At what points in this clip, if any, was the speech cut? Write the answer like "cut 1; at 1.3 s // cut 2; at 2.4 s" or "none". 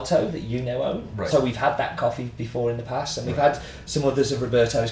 cut 1; at 1.3 s